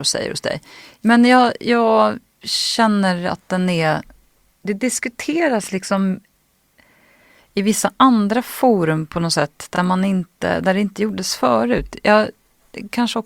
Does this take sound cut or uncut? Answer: uncut